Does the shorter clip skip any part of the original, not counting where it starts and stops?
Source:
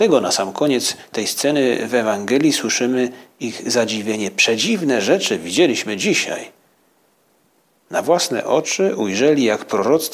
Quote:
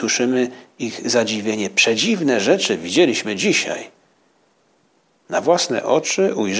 no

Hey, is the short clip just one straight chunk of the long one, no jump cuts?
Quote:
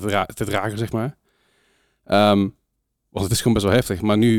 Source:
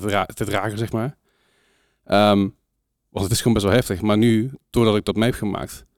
yes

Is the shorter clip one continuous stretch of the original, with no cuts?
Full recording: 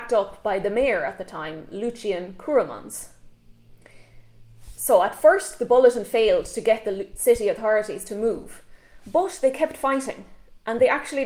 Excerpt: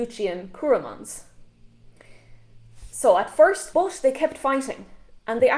no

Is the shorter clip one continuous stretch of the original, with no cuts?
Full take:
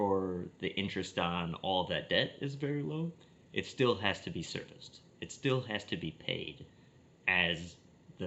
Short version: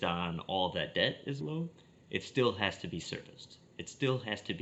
no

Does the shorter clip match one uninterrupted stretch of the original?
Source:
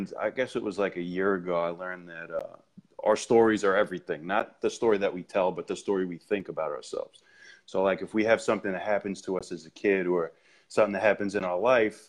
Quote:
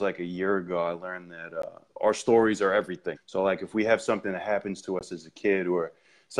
no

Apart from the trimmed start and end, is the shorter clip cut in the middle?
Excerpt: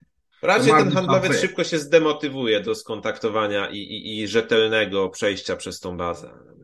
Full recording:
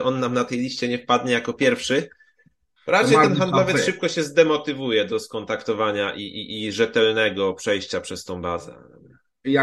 no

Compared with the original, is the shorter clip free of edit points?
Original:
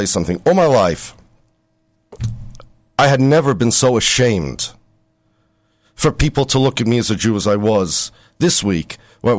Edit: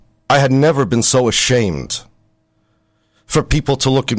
yes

